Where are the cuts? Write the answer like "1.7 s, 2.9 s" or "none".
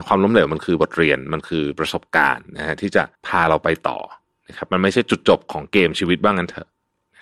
3.1 s